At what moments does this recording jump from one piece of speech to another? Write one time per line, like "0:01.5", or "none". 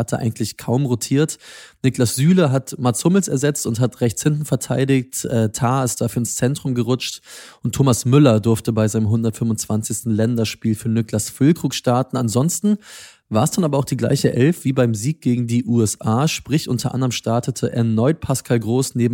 none